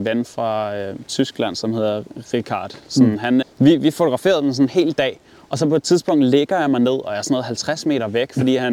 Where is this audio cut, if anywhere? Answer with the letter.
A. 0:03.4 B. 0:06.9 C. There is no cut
A